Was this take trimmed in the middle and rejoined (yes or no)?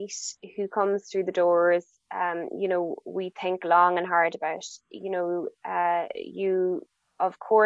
no